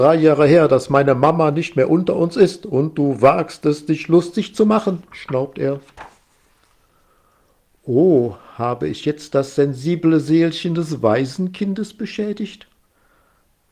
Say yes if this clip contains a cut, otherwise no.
no